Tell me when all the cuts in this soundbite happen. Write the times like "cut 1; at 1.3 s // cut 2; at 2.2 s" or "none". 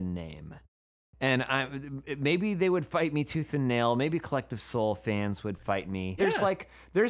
cut 1; at 6.2 s